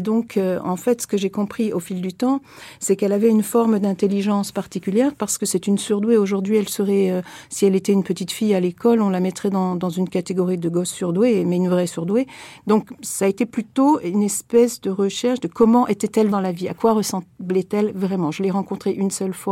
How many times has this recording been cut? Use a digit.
2